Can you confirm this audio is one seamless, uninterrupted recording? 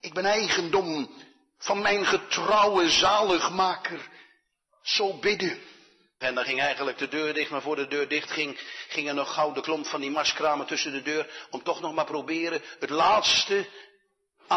no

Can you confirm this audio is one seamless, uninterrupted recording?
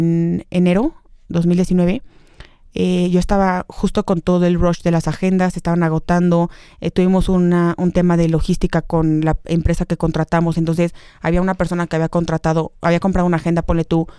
yes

